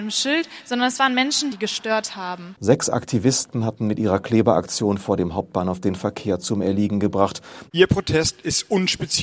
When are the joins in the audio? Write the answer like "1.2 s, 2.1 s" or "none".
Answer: 1.5 s, 2.6 s, 7.7 s